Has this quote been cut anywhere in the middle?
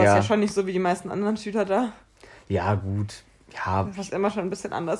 no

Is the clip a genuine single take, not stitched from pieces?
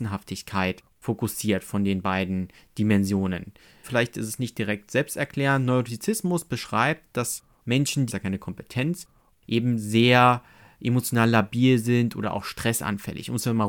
no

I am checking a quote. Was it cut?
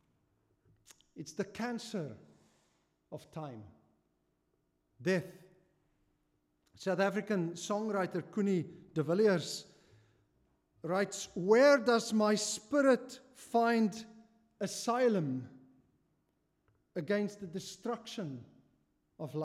no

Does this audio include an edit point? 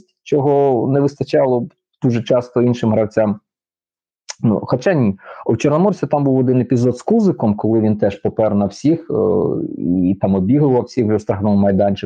no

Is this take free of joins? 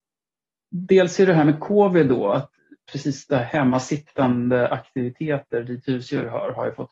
yes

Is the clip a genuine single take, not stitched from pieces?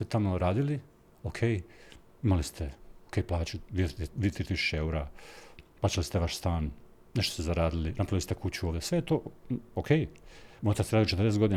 yes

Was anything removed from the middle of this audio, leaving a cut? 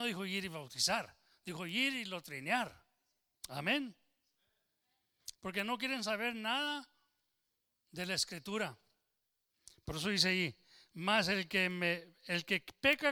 yes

